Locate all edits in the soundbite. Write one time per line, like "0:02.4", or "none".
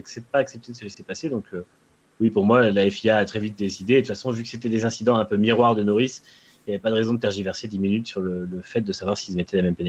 none